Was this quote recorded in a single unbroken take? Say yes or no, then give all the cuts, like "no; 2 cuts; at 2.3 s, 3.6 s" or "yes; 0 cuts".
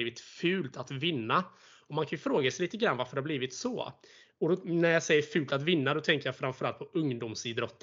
yes; 0 cuts